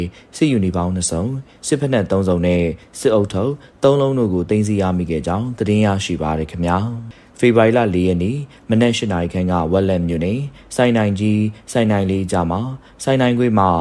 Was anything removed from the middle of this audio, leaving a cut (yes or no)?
no